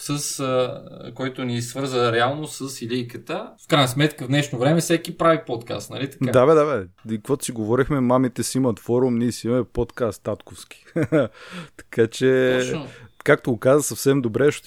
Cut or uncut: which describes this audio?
cut